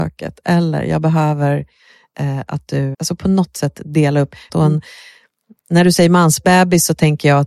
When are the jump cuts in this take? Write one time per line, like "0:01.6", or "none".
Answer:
0:02.9
0:04.5